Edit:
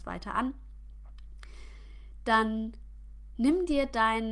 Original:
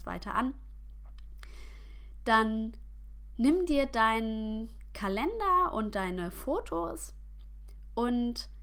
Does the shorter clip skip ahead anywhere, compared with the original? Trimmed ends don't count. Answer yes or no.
no